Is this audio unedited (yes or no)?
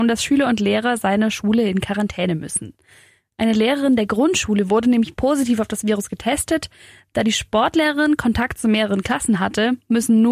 yes